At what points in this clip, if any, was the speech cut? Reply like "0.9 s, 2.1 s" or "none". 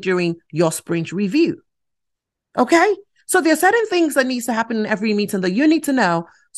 none